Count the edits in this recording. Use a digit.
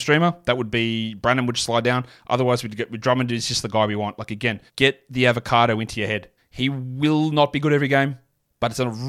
2